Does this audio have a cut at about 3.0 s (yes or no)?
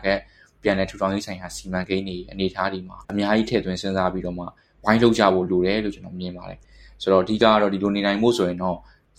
yes